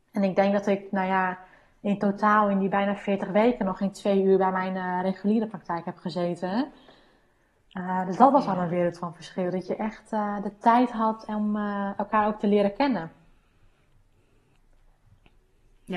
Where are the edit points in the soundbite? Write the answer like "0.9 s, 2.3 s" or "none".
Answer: none